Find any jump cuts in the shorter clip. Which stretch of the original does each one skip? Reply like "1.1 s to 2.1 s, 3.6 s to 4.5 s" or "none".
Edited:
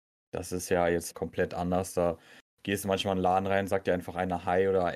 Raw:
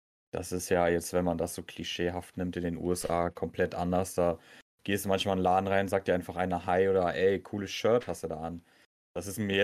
1.1 s to 3.3 s